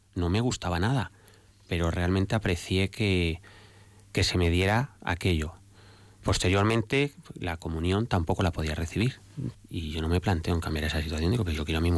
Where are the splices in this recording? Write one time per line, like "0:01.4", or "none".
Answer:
0:05.0
0:09.5